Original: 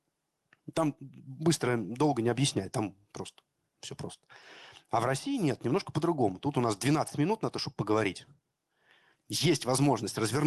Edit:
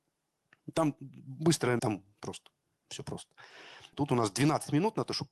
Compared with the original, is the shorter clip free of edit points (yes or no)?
no